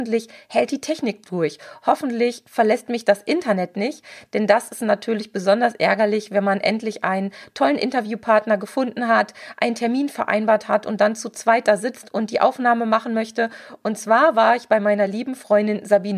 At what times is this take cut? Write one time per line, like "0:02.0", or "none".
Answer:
0:13.8